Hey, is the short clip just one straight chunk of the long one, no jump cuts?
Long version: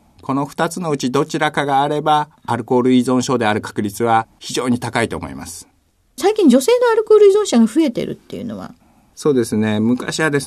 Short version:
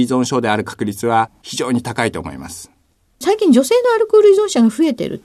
yes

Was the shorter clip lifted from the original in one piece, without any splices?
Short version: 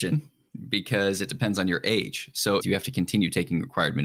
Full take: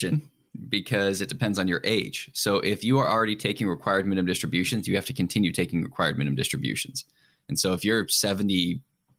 no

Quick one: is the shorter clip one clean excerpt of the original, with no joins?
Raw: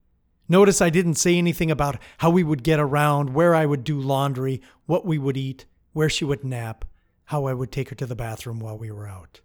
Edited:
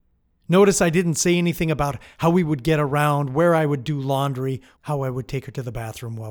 no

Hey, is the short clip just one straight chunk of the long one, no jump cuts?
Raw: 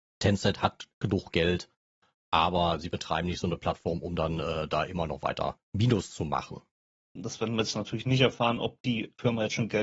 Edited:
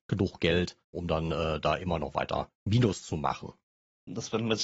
no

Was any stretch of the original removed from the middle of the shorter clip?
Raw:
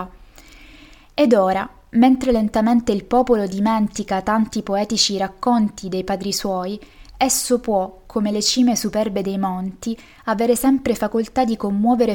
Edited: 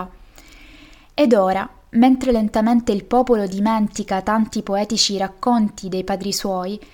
no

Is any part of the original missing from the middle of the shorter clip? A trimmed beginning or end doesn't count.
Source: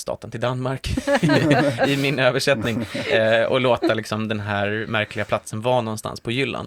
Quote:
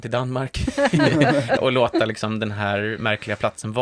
yes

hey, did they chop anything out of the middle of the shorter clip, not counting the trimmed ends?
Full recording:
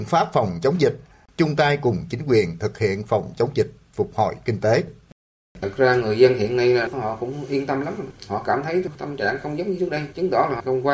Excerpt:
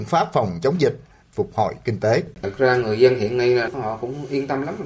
yes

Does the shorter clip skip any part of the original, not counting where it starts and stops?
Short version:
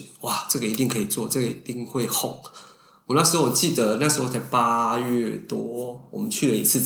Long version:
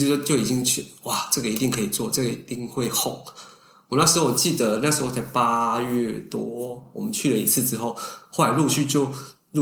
no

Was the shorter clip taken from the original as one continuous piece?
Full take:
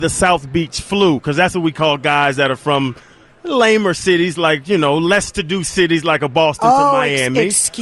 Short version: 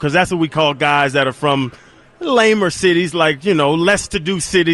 yes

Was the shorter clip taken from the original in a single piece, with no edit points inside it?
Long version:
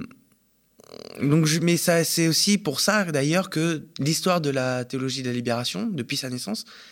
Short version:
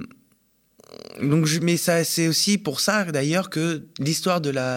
yes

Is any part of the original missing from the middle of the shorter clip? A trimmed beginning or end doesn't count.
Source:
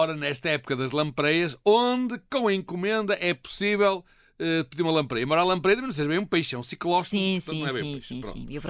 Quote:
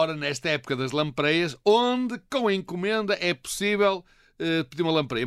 no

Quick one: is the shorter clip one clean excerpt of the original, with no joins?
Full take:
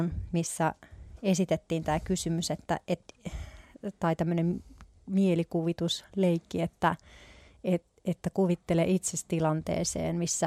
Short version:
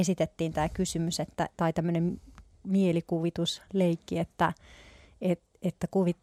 no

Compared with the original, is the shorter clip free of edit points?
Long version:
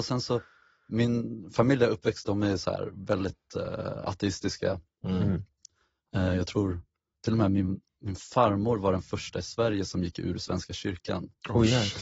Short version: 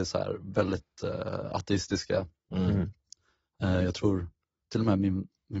yes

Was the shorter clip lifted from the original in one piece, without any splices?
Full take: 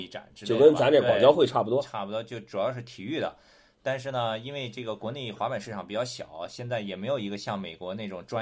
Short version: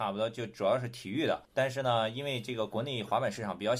no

